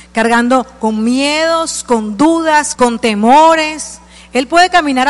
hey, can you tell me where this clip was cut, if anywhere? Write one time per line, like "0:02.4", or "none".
0:02.7

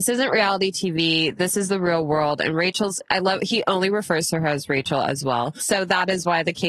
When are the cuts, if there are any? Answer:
0:05.6

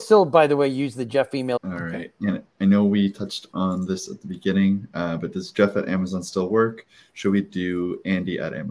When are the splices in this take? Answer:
0:01.6

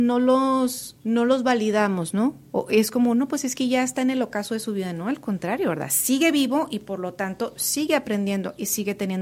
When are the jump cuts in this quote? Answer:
0:01.0

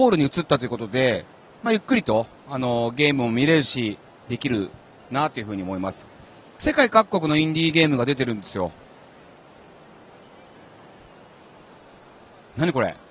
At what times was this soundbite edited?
none

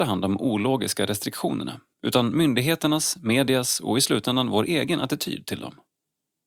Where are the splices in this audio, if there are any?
none

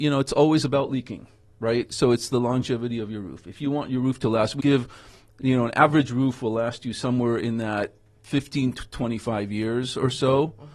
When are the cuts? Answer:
0:04.6

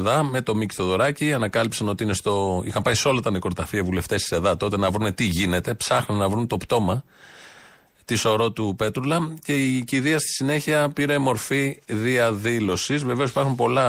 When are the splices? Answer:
none

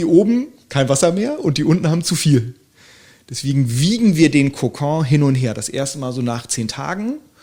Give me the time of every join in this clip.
none

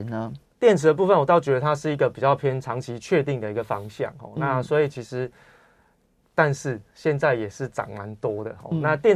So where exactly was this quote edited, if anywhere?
none

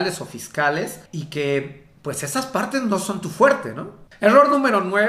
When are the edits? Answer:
0:01.1
0:04.1

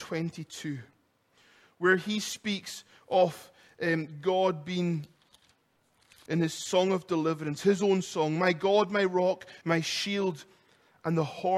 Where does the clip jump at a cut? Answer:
0:06.3
0:09.6

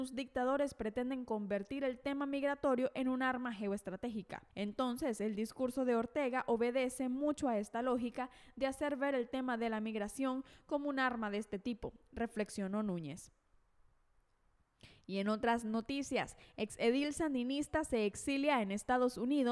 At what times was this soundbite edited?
0:04.5

